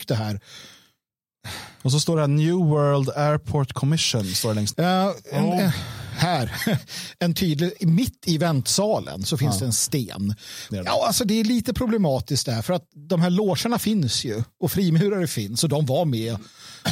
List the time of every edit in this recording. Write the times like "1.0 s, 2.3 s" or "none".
4.7 s, 10.7 s

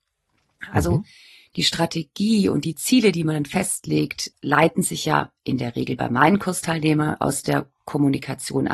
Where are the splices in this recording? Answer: 4.3 s

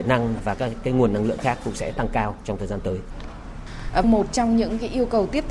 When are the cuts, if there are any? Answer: 4.0 s

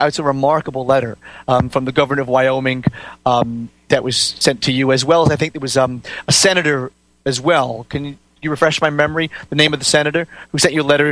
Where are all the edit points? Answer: none

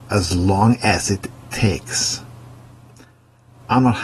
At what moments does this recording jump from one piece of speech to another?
none

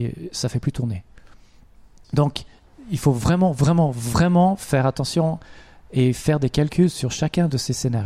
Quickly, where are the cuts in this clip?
none

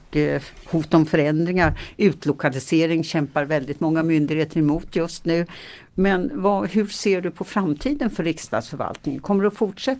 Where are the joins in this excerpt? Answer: none

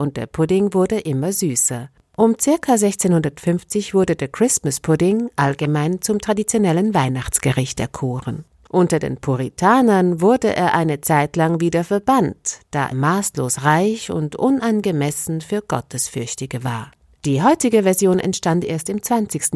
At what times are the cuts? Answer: 12.9 s

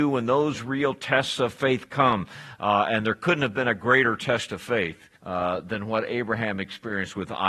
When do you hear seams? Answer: 5.2 s

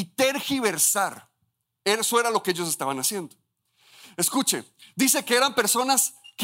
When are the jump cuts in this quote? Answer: none

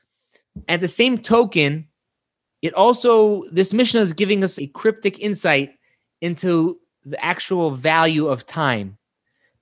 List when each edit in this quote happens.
4.6 s

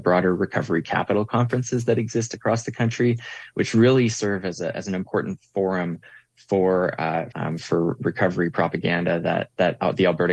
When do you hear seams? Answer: 7.3 s

